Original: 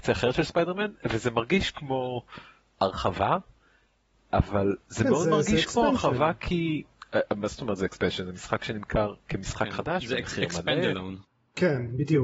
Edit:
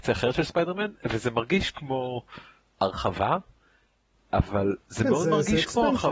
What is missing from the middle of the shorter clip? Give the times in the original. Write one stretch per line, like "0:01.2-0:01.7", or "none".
none